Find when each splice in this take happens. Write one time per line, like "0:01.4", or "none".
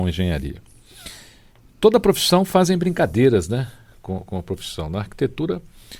none